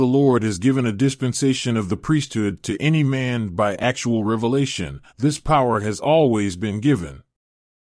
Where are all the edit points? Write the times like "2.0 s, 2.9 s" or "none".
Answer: 5.1 s